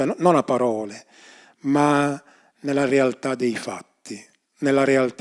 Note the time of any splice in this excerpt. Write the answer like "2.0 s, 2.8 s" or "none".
none